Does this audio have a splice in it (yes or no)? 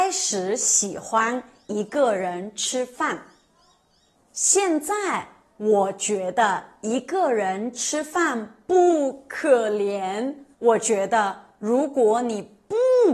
yes